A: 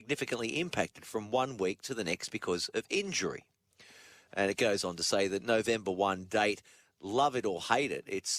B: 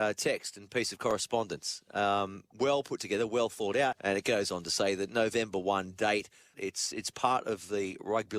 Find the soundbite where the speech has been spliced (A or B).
B